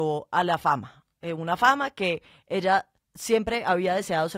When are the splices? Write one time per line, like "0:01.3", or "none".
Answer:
none